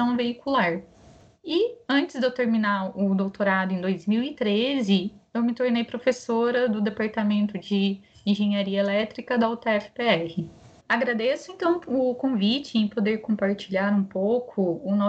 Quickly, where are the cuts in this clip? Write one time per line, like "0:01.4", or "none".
0:10.8